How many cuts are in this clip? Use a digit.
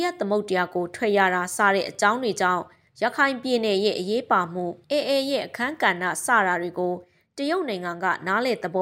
1